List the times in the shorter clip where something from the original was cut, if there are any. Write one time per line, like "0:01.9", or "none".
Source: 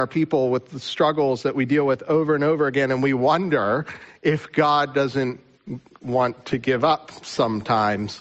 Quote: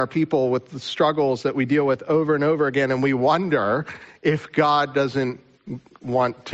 none